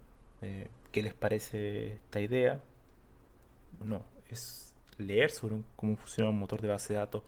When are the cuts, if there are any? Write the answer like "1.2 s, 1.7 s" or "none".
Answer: 3.8 s